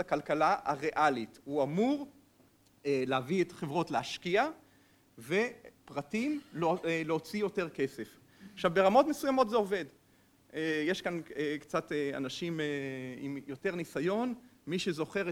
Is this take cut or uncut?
uncut